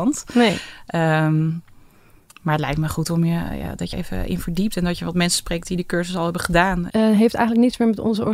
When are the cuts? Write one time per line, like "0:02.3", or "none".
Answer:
0:03.9
0:06.9